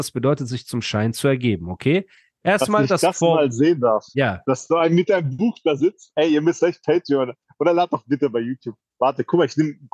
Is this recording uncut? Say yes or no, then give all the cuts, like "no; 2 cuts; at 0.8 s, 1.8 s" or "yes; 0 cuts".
yes; 0 cuts